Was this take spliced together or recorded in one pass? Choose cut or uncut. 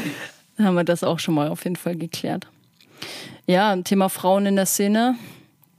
cut